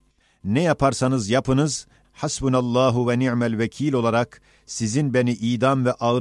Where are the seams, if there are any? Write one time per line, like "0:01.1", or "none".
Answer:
0:02.0